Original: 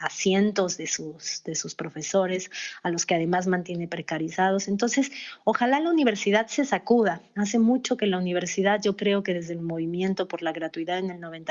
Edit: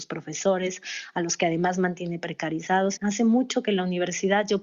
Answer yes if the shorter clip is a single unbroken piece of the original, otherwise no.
no